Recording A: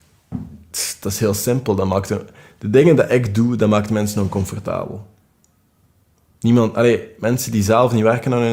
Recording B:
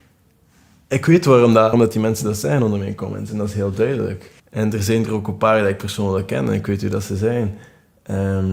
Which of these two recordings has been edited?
B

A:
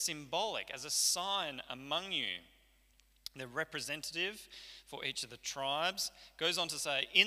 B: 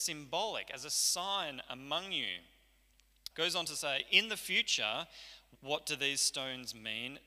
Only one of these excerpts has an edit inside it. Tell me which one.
B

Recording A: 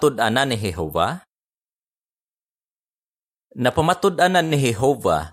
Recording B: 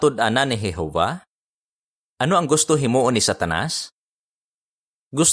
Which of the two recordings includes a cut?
B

